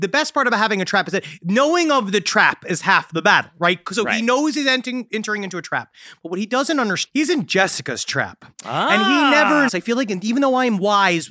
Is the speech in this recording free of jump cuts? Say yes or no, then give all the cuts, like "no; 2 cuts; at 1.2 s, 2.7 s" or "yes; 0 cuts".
no; 2 cuts; at 7.1 s, 9.7 s